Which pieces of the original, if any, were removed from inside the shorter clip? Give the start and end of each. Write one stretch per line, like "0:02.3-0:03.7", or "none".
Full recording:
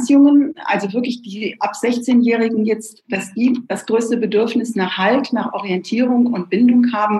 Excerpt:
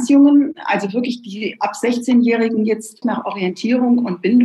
0:03.0-0:05.3